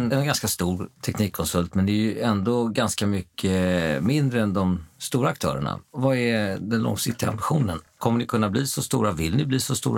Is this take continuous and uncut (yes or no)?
yes